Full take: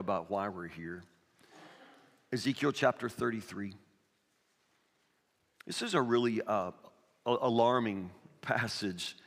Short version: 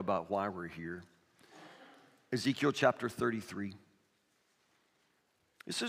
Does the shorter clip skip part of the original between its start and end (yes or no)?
no